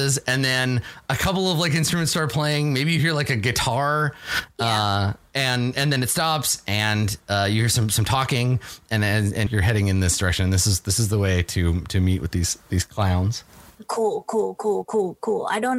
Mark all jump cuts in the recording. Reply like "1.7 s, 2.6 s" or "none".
9.5 s, 14.8 s